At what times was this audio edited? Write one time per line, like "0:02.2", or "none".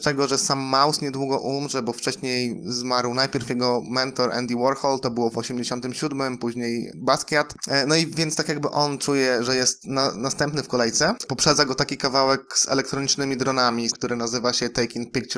0:11.3
0:13.9